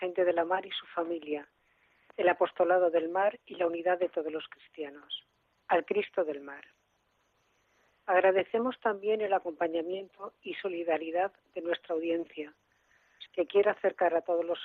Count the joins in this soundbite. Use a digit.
3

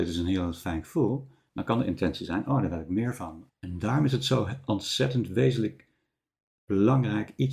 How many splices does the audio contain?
1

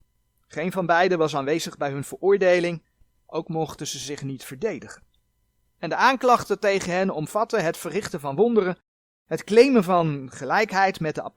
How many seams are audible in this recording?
0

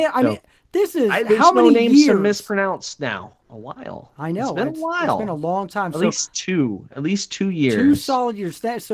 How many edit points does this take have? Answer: 1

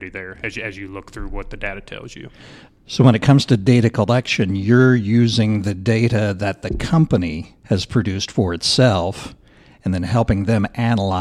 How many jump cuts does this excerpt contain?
1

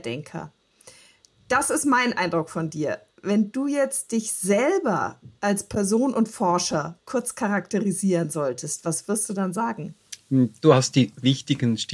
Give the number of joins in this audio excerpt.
0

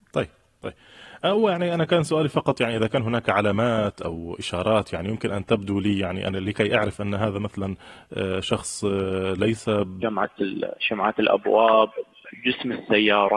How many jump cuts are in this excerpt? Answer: 1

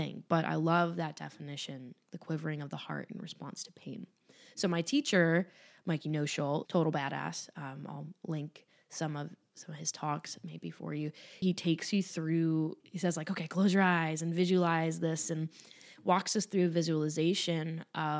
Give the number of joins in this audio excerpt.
3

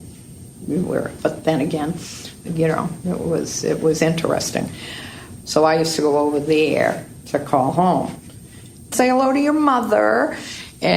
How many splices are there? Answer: 3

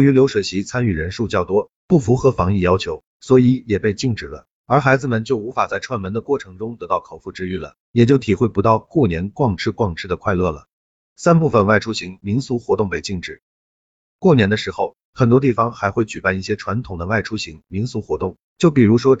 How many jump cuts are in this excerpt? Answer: 1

